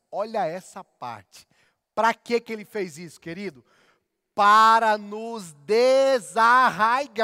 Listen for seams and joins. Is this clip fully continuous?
yes; 0 cuts

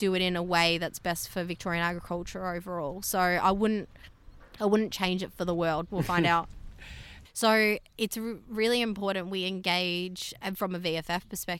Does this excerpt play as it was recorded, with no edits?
no; 2 cuts; at 5.9 s, 7.2 s

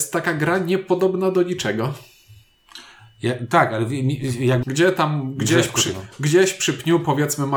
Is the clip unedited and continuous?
no; 2 cuts; at 4.6 s, 5.9 s

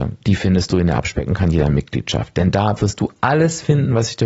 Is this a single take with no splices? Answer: yes; 0 cuts

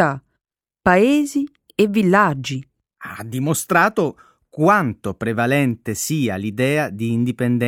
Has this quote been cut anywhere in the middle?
no; 0 cuts

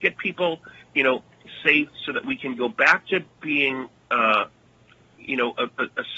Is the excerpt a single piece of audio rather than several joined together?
yes; 0 cuts

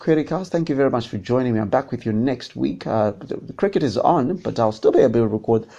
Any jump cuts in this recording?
no; 0 cuts

